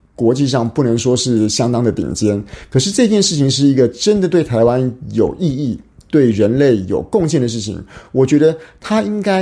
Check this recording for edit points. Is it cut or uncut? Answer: uncut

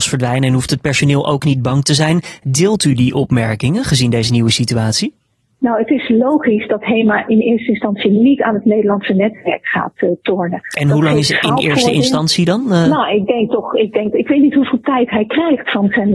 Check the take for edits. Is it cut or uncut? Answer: uncut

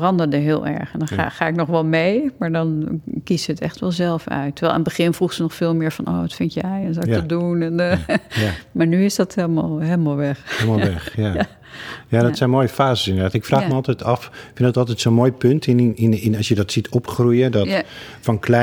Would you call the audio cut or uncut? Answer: uncut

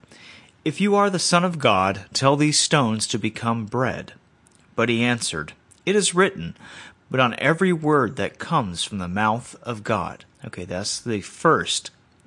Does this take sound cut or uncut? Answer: cut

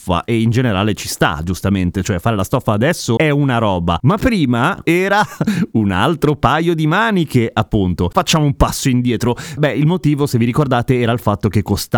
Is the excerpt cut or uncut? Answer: cut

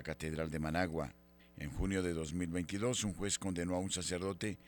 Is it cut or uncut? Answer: cut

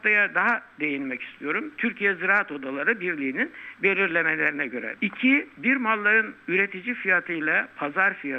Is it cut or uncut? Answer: cut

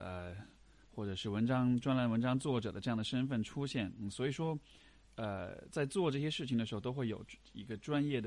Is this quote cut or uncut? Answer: uncut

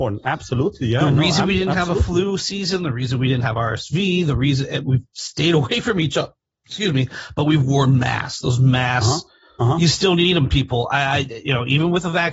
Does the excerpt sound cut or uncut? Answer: uncut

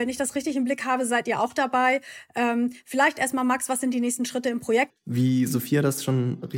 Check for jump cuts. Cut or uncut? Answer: cut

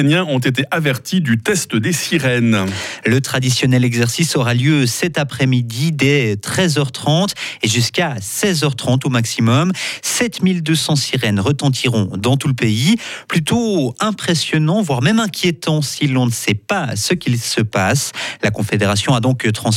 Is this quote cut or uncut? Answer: uncut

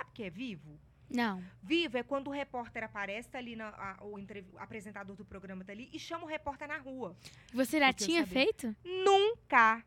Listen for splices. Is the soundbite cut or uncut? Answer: cut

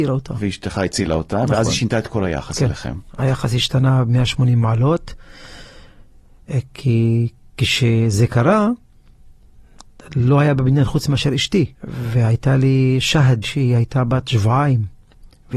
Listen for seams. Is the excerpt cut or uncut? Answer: cut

